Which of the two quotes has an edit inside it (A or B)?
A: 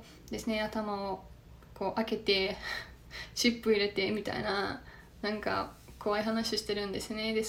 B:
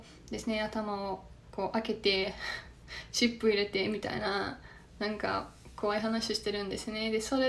B